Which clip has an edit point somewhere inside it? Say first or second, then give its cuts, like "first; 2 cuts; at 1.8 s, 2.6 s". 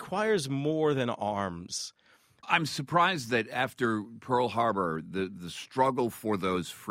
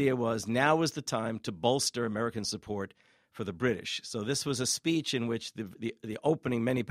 first; 1 cut; at 2.4 s